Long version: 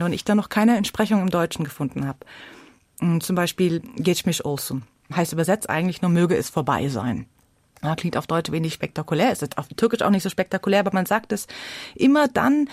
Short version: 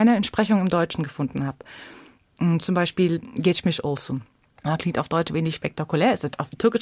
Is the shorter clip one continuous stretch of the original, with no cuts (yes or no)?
no